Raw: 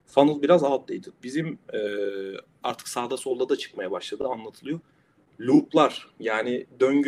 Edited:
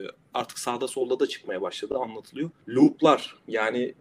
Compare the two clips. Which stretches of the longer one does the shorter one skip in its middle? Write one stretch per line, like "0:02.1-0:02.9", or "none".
0:04.9-0:05.3

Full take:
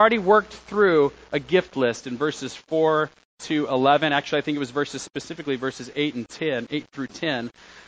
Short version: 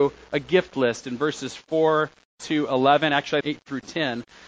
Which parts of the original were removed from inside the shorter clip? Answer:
0:04.4-0:06.7

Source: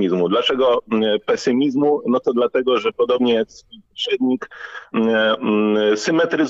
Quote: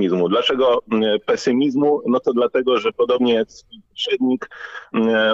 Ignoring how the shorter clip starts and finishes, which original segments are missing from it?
none

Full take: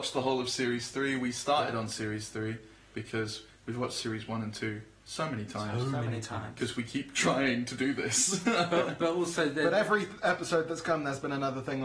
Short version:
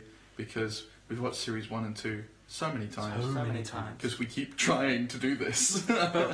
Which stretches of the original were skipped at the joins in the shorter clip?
none

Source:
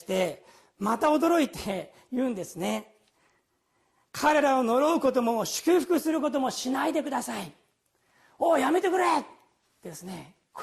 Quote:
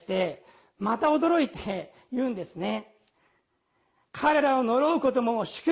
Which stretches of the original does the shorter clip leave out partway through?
none

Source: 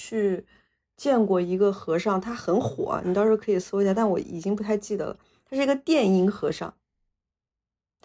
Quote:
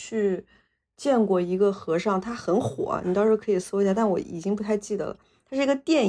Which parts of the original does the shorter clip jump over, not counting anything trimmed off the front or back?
none

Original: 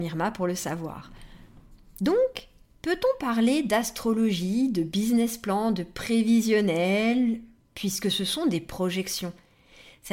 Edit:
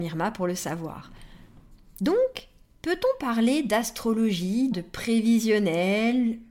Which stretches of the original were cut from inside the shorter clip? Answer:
0:04.7-0:05.7

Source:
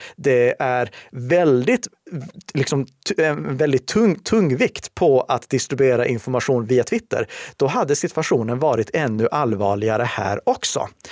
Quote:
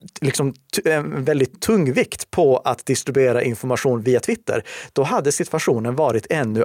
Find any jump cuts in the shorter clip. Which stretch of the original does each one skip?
0:03.9-0:04.2

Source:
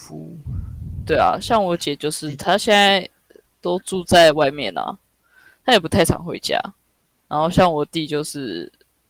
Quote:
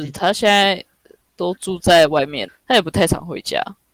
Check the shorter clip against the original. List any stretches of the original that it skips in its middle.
0:04.7-0:05.5

